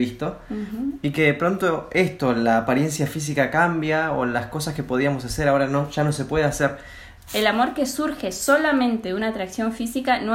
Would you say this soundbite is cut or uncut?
cut